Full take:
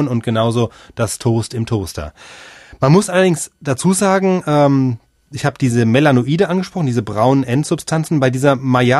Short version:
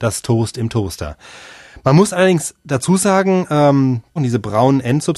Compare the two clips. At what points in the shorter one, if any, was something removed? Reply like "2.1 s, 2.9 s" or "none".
4.2 s